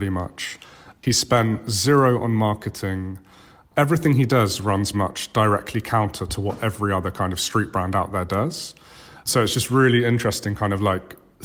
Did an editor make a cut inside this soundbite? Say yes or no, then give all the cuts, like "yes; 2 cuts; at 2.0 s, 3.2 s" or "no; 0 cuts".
yes; 1 cut; at 4.9 s